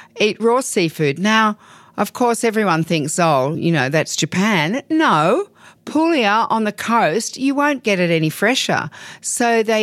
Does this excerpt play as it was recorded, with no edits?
yes; 0 cuts

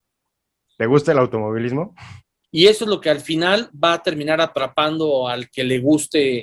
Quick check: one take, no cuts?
no; 1 cut; at 2.4 s

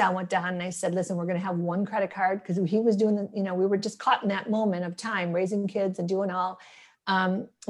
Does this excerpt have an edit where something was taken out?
no; 0 cuts

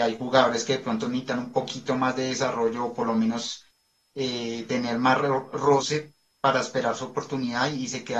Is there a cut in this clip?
no; 0 cuts

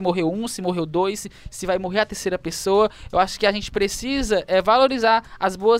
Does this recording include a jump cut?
no; 0 cuts

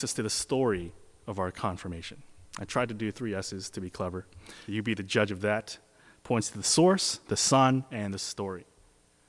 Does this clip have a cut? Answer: yes; 1 cut; at 4.7 s

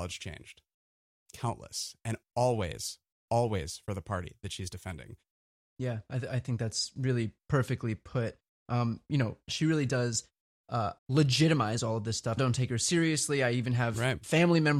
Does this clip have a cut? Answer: yes; 3 cuts; at 9.5 s, 11.0 s, 12.4 s

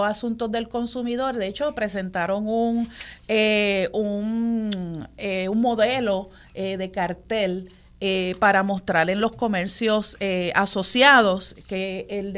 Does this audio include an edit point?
no; 0 cuts

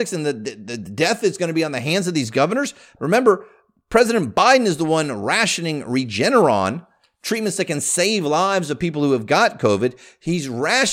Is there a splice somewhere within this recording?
yes; 1 cut; at 3.0 s

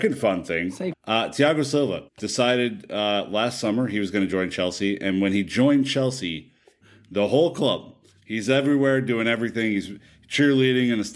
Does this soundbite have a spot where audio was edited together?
yes; 3 cuts; at 0.9 s, 2.1 s, 6.8 s

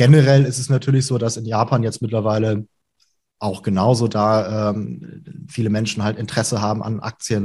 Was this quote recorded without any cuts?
yes; 0 cuts

